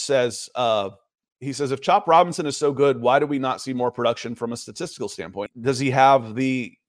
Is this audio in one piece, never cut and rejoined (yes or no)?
no